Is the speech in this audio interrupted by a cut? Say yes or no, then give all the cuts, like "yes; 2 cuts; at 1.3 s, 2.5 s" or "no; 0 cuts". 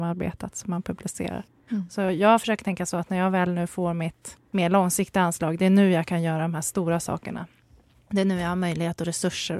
yes; 2 cuts; at 1.7 s, 4.5 s